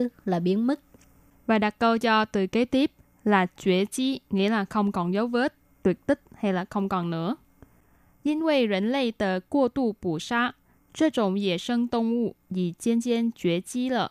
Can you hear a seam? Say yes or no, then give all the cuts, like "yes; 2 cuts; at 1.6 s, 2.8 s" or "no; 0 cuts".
no; 0 cuts